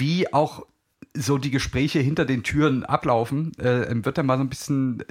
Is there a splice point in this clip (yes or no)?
no